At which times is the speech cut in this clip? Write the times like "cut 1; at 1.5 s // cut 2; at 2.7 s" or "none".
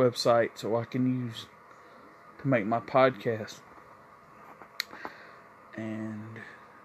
cut 1; at 5.7 s